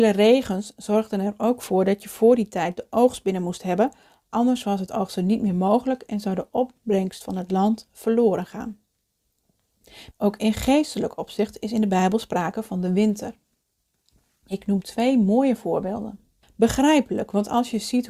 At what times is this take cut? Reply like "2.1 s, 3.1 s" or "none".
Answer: 10.1 s, 16.4 s